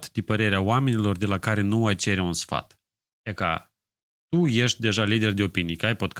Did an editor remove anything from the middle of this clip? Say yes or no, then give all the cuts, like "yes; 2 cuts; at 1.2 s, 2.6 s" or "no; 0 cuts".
no; 0 cuts